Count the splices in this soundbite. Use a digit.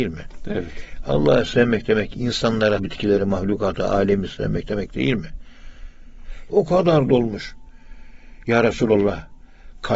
2